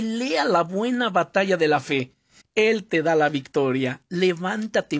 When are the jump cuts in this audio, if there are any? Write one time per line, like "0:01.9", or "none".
0:02.4
0:04.1